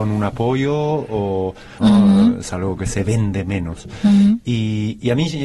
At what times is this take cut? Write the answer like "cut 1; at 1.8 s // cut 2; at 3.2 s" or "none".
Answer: cut 1; at 1.8 s

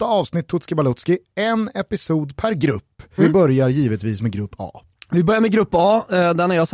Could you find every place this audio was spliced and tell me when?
cut 1; at 3.2 s

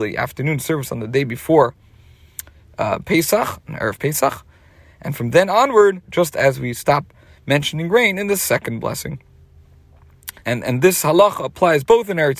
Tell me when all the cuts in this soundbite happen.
cut 1; at 6.1 s // cut 2; at 10.4 s

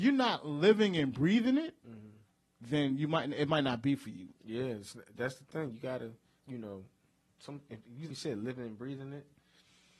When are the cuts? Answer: cut 1; at 6.4 s // cut 2; at 8.1 s

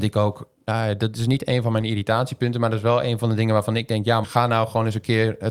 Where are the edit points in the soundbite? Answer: cut 1; at 4.2 s

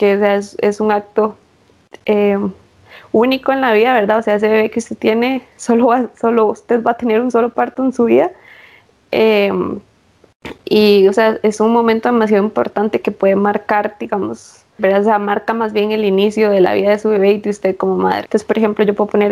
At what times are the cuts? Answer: cut 1; at 14.8 s // cut 2; at 18.2 s

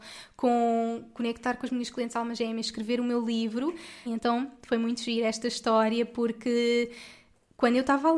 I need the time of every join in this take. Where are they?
cut 1; at 4.1 s

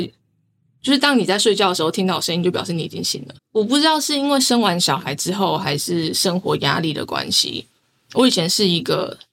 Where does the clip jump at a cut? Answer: cut 1; at 3.4 s

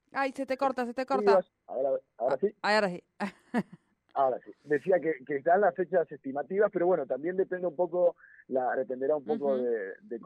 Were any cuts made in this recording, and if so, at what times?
cut 1; at 1.5 s // cut 2; at 8.8 s

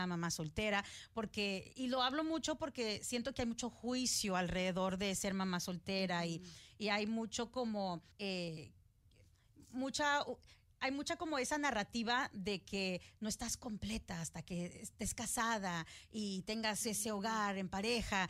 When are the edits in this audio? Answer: cut 1; at 8.1 s

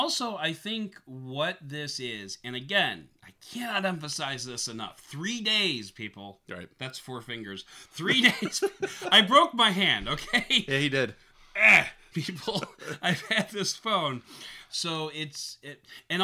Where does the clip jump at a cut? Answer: cut 1; at 12.1 s // cut 2; at 14.7 s

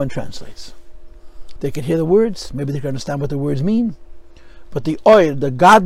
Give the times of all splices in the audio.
cut 1; at 1.6 s

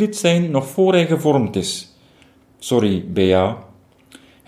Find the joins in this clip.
none

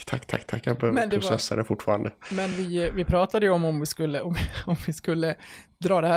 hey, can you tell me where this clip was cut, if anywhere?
none

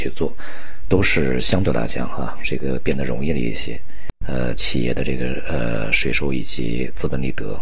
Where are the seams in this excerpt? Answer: cut 1; at 4.2 s

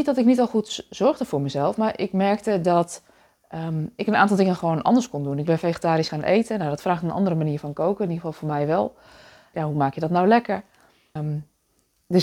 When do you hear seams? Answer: cut 1; at 9.5 s // cut 2; at 11.2 s

